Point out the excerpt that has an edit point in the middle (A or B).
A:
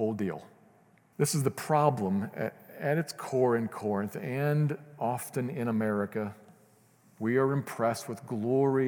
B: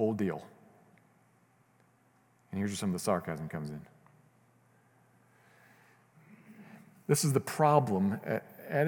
A